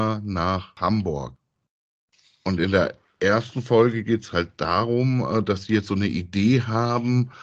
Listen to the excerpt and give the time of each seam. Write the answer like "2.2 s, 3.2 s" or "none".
none

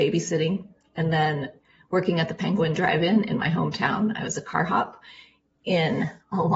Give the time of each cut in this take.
none

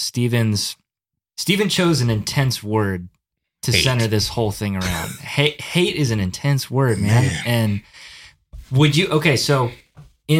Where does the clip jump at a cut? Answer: none

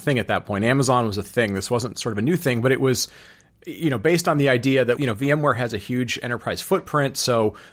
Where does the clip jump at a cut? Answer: 5.0 s

